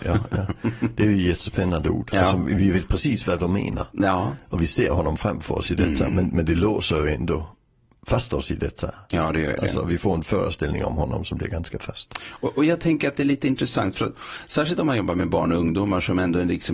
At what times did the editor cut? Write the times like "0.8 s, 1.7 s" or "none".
none

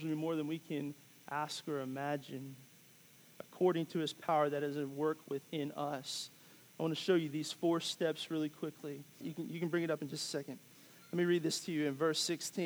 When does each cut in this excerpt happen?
9.2 s

